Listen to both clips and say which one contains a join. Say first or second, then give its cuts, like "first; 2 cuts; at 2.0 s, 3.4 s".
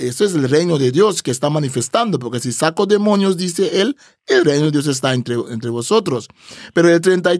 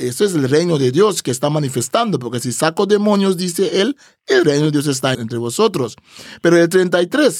second; 1 cut; at 5.1 s